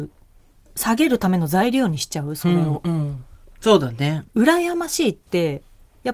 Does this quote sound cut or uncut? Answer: cut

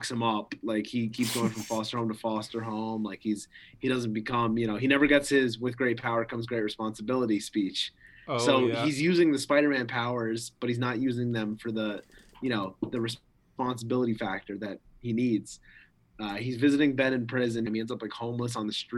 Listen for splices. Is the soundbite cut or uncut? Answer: cut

